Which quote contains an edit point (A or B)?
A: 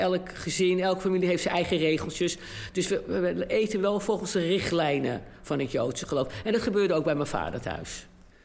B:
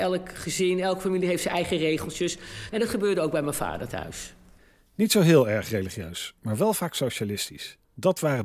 B